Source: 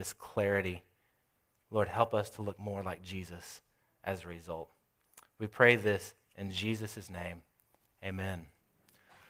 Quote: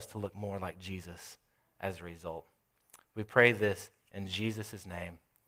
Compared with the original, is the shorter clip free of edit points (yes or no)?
yes